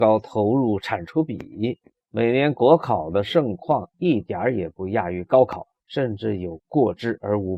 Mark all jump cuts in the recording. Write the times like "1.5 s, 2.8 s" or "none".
2.0 s